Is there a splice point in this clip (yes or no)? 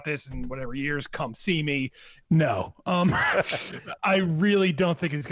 yes